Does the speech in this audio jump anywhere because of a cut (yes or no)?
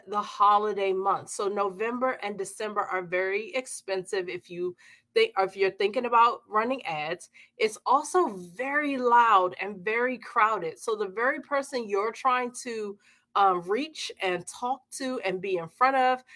no